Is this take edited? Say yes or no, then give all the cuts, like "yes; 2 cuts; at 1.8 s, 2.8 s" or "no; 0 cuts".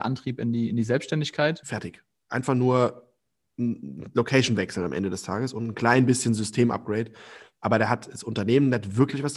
yes; 1 cut; at 1.6 s